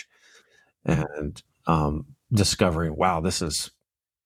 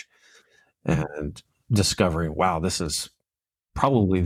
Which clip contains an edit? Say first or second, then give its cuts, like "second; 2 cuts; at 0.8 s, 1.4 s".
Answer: second; 1 cut; at 1.6 s